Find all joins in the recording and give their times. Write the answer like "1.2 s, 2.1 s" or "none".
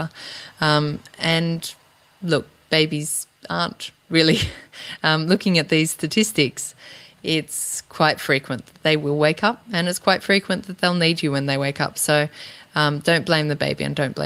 none